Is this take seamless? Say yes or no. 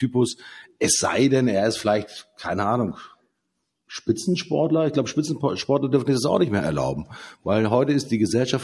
yes